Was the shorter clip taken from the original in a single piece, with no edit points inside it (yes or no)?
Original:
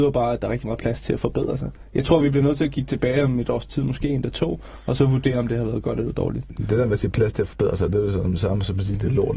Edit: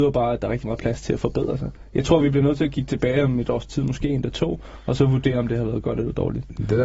yes